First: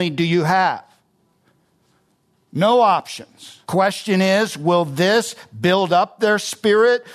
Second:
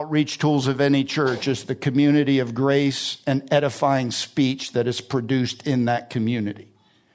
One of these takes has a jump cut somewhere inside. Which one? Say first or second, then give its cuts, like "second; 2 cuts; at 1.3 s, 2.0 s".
first; 1 cut; at 3.6 s